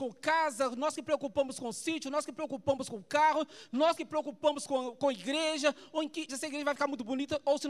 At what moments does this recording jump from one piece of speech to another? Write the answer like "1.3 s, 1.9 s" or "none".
6.3 s